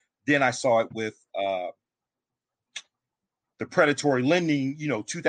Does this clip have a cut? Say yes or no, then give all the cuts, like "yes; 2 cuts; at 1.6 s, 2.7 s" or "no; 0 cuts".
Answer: no; 0 cuts